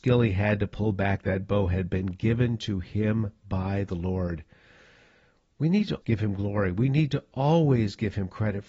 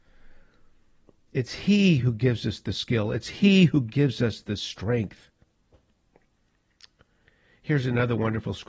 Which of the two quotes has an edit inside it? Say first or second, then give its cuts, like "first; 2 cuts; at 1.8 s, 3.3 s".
first; 1 cut; at 6.0 s